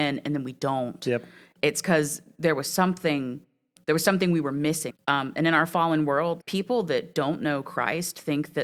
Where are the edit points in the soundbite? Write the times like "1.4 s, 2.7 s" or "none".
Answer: 4.9 s, 6.4 s